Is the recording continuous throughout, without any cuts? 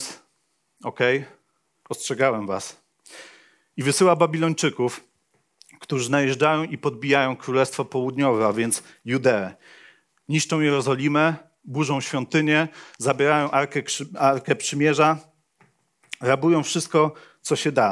yes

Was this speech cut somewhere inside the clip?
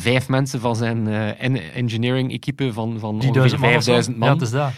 no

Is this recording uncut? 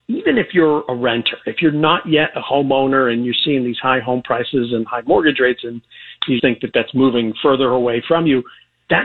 no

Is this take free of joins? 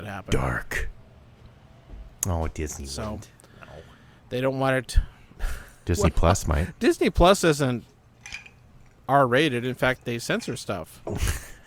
no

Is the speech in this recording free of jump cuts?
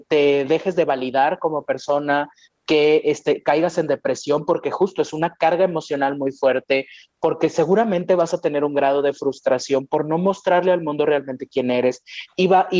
yes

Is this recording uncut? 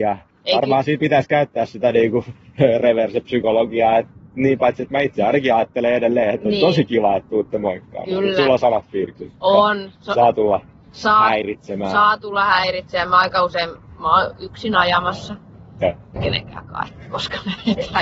no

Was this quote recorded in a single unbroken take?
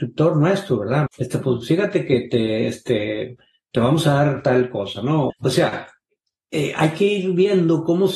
no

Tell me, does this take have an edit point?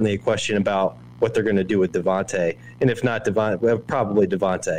no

